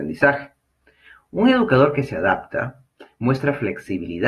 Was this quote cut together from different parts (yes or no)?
no